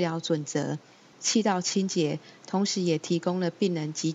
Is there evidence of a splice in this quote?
yes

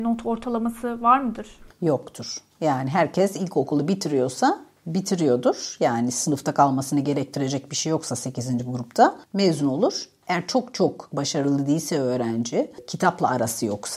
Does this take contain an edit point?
no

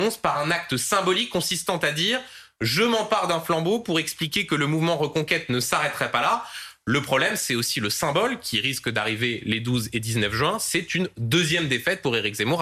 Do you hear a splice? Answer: no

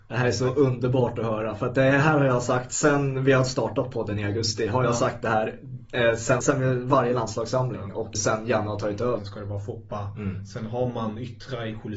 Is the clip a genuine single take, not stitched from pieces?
no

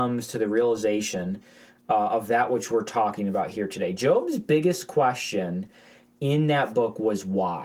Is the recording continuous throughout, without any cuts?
yes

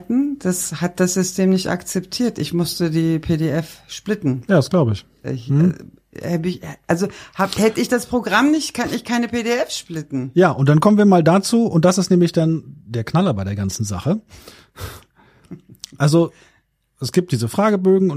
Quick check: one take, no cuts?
yes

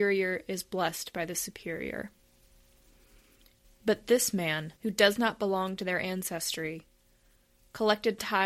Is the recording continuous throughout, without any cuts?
no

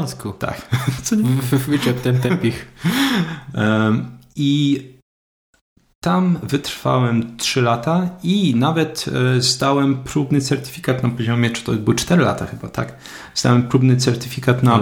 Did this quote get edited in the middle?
no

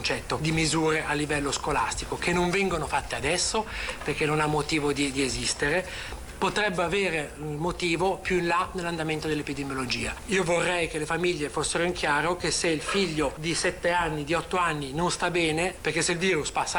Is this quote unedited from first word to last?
no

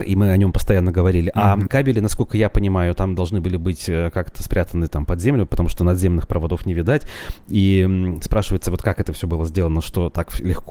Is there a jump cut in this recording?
yes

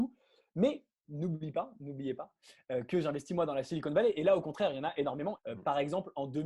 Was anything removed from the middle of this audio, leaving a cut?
yes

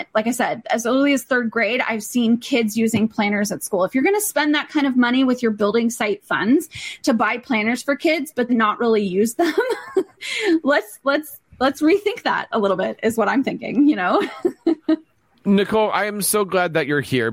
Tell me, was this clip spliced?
yes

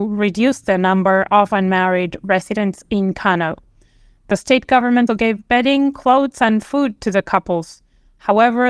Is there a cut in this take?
yes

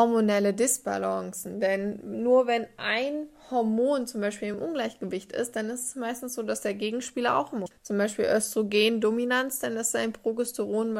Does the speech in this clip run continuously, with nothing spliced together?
yes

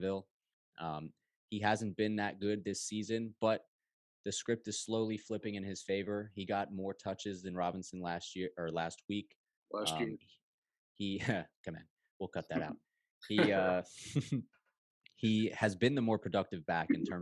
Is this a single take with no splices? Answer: yes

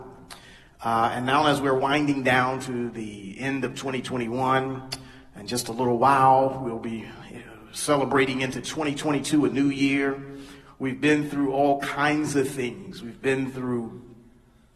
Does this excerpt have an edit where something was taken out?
no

